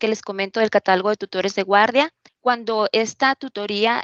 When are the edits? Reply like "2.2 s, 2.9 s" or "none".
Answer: 2.3 s